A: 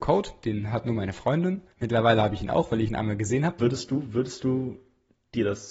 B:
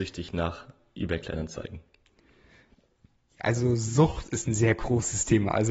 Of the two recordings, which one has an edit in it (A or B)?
A